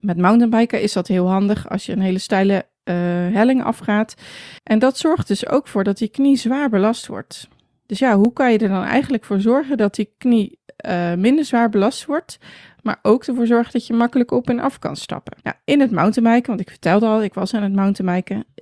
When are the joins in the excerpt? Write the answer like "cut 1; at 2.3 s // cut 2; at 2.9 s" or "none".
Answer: cut 1; at 4.6 s // cut 2; at 15.4 s